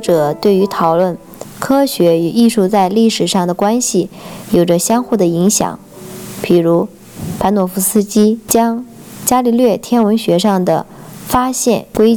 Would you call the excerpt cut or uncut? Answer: uncut